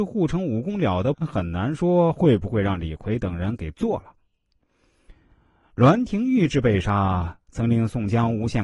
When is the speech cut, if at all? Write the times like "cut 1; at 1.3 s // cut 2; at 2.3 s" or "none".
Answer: cut 1; at 1.1 s